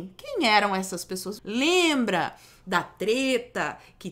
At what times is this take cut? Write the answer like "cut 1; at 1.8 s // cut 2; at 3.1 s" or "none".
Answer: cut 1; at 1.4 s